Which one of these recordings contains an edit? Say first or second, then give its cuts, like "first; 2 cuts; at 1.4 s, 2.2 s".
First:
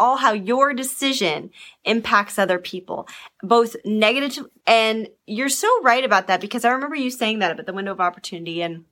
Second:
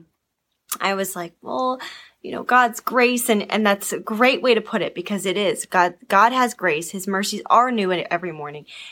first; 1 cut; at 4.6 s